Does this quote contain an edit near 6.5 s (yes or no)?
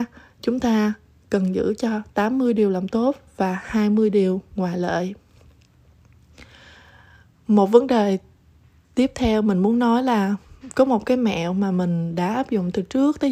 no